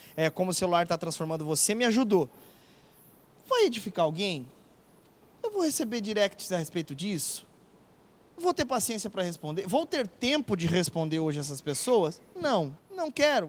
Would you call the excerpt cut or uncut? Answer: uncut